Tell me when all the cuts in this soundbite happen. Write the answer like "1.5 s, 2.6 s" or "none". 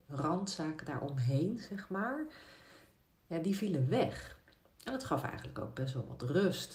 none